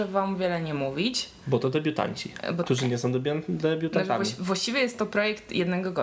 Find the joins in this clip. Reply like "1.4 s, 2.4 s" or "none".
2.6 s